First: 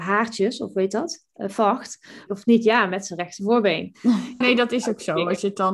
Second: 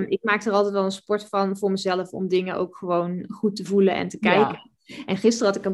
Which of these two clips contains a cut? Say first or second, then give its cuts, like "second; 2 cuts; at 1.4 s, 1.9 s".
first; 2 cuts; at 2.3 s, 4.4 s